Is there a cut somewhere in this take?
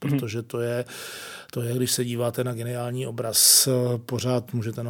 no; 0 cuts

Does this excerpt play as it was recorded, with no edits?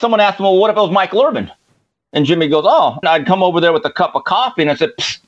no; 1 cut; at 3.0 s

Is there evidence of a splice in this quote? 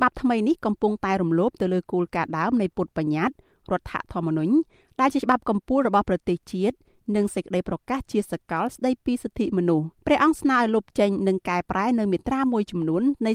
yes; 1 cut; at 10.0 s

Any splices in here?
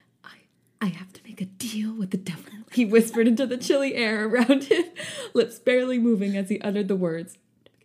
no; 0 cuts

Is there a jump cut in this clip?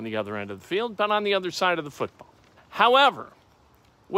yes; 1 cut; at 2.6 s

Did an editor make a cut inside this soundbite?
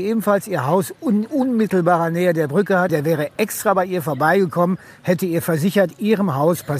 yes; 1 cut; at 2.9 s

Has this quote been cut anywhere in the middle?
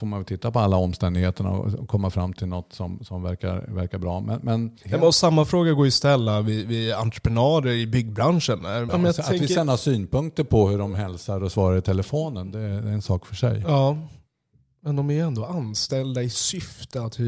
yes; 2 cuts; at 4.8 s, 8.9 s

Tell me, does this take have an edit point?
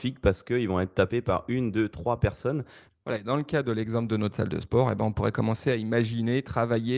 yes; 1 cut; at 2.9 s

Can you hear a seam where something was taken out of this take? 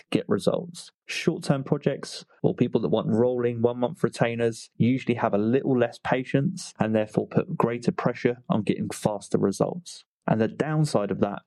no; 0 cuts

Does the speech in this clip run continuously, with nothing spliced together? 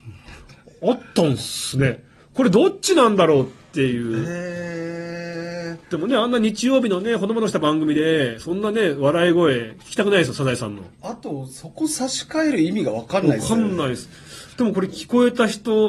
yes; 0 cuts

